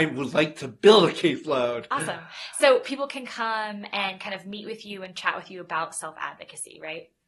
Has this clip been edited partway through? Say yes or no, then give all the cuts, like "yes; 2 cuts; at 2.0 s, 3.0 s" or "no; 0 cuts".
no; 0 cuts